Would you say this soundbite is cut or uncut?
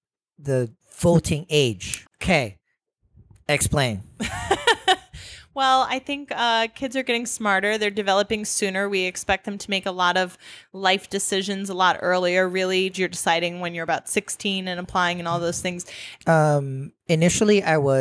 cut